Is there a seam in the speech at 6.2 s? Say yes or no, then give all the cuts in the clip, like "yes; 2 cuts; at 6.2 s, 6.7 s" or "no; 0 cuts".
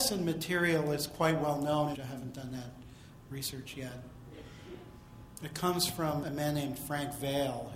yes; 2 cuts; at 1.9 s, 6.2 s